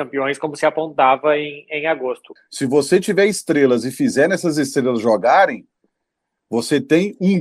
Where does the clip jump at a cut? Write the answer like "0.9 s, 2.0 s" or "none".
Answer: 2.4 s

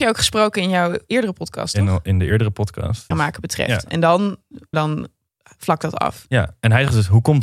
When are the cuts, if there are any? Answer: 3.1 s, 4.7 s

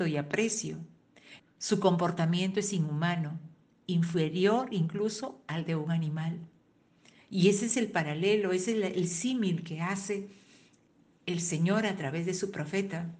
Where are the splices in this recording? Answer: 1.4 s

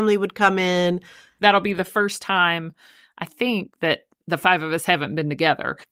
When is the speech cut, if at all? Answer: 1.4 s

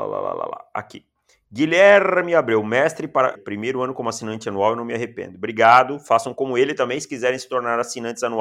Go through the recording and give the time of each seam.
3.4 s

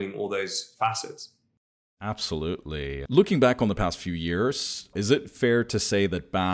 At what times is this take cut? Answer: 3.1 s, 4.9 s

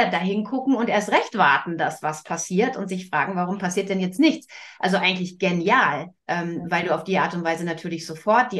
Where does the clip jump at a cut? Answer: 6.2 s

